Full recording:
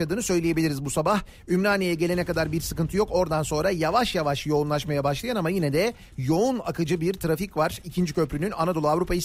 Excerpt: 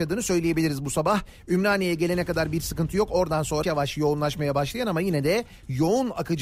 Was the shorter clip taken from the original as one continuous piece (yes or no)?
no